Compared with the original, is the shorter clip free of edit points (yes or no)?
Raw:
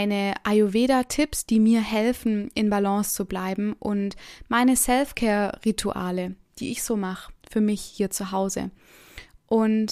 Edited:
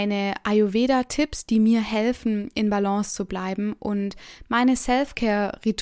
yes